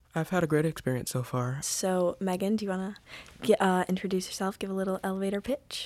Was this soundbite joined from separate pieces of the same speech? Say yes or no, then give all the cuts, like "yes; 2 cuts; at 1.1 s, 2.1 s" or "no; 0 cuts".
yes; 1 cut; at 1.6 s